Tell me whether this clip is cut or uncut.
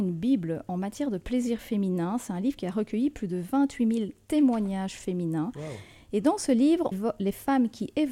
cut